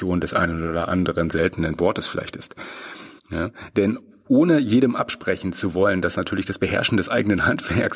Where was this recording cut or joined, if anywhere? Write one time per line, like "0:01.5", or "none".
0:03.2